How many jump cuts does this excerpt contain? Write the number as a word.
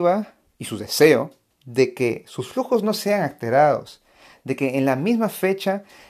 one